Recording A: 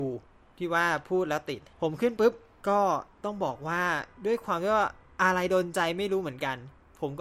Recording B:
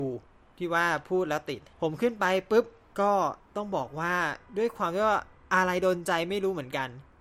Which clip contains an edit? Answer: A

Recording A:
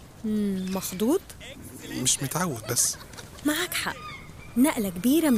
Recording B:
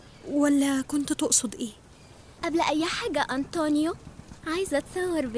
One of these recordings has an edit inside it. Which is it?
B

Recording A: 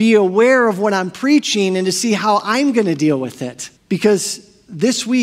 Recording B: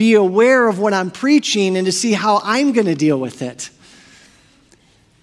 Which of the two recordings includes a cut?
A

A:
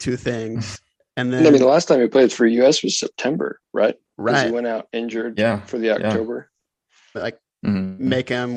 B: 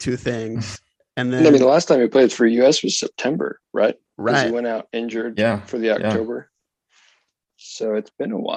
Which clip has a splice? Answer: A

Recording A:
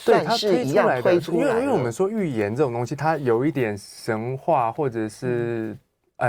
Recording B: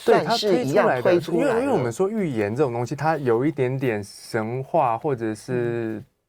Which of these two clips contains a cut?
A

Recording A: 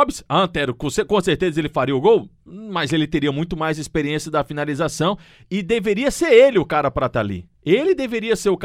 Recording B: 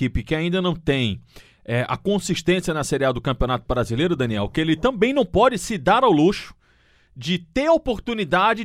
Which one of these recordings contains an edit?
A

